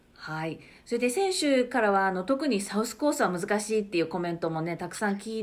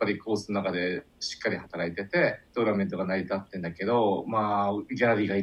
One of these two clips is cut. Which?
second; 1 cut; at 2.4 s

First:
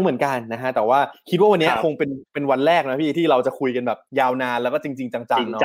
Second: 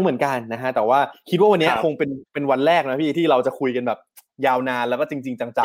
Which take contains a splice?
first; 1 cut; at 4.1 s

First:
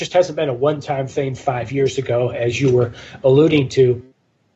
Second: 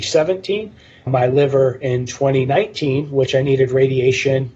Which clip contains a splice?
second; 1 cut; at 1.1 s

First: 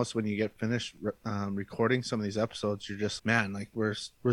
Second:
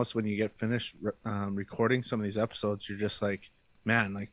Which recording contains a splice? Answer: first; 1 cut; at 3.2 s

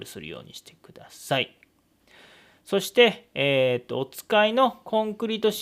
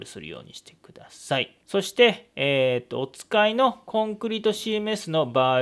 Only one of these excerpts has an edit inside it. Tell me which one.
second; 1 cut; at 1.6 s

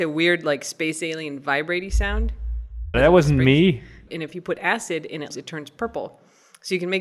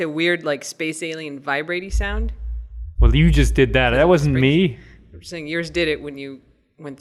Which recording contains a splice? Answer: first; 3 cuts; at 2.9 s, 4.1 s, 5.3 s

